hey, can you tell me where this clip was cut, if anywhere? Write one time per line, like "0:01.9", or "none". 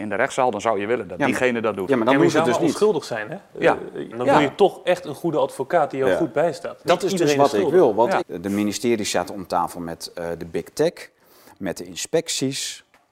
0:04.1
0:06.8
0:08.2